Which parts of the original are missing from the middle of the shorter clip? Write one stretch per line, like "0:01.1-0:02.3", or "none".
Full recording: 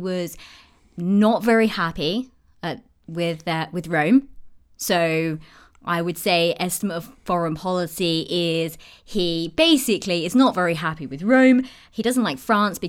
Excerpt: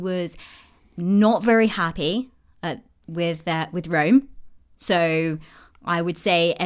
none